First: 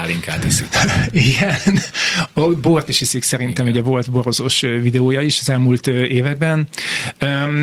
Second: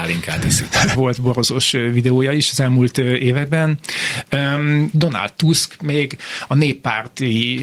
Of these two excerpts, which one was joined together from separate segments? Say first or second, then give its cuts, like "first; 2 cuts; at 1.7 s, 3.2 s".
second; 2 cuts; at 0.9 s, 4.9 s